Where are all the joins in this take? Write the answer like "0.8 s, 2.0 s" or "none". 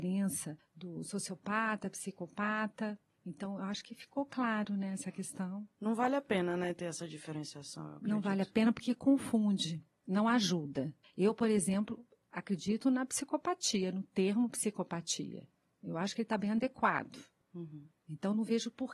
none